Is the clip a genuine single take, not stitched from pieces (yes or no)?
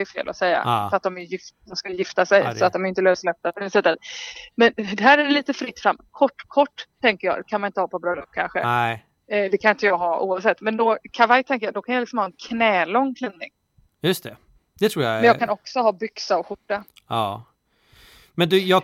yes